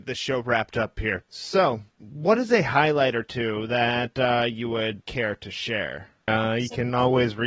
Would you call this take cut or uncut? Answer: cut